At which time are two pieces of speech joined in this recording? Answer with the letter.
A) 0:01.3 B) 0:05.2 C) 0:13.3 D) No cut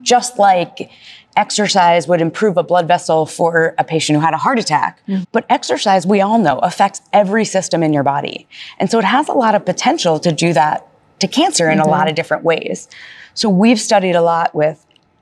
B